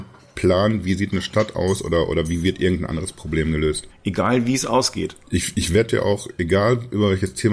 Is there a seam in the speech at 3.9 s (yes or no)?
yes